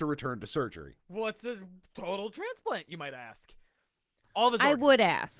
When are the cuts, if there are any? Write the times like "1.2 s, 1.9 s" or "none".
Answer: 1.0 s, 4.2 s